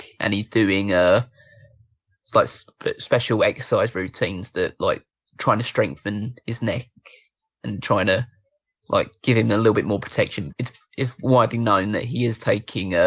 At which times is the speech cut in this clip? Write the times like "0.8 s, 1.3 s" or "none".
10.5 s